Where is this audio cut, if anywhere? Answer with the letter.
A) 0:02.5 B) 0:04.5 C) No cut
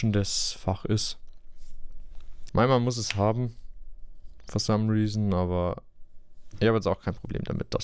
A